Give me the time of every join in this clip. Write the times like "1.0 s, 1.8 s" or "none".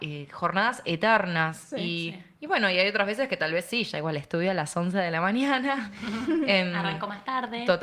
none

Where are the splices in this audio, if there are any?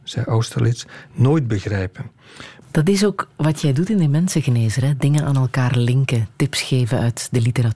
2.6 s

